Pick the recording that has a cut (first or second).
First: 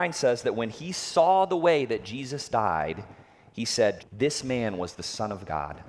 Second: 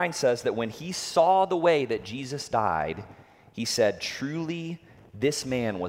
first